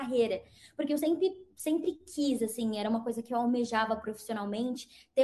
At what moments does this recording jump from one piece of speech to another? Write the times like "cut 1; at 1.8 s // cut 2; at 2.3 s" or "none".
none